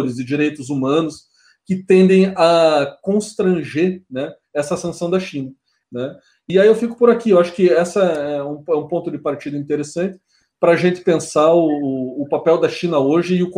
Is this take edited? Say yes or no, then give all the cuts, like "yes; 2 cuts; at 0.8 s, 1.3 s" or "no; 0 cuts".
yes; 1 cut; at 5.8 s